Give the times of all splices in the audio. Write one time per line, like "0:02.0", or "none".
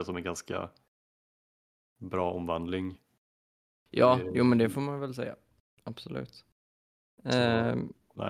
none